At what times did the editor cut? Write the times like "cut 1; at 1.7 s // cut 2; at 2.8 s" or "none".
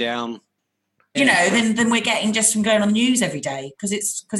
cut 1; at 1.1 s